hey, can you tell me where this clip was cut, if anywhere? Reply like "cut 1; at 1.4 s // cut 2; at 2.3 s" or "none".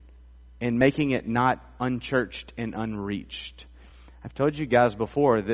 none